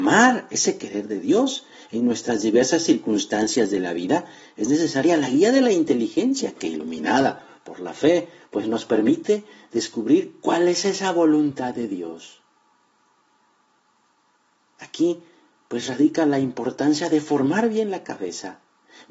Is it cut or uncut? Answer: uncut